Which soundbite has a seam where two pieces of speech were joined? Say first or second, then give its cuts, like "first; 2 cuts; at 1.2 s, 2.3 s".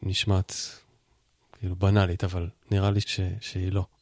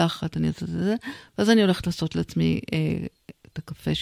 first; 1 cut; at 3.0 s